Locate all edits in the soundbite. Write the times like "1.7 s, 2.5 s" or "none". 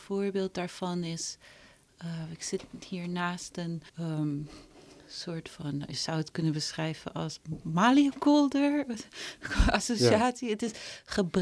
3.9 s